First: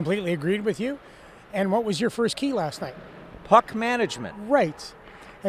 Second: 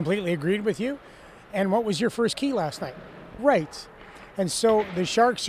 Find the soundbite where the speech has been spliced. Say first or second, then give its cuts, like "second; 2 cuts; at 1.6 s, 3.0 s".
second; 1 cut; at 3.4 s